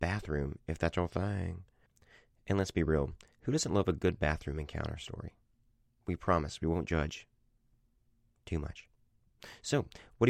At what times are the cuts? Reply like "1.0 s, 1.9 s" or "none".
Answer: none